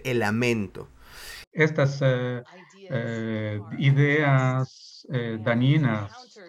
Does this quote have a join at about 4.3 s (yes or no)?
no